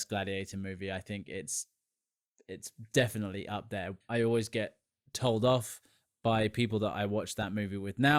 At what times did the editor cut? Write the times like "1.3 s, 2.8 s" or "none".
4.0 s